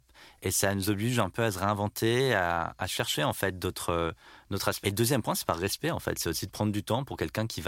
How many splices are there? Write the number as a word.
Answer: one